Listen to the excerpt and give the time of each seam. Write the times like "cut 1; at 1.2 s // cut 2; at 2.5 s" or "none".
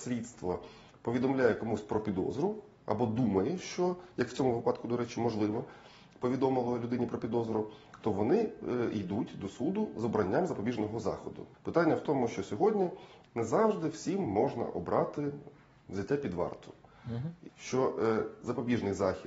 cut 1; at 11.5 s // cut 2; at 13.3 s // cut 3; at 17.5 s